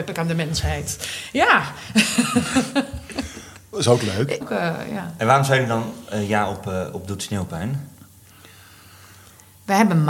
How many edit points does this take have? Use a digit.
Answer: 1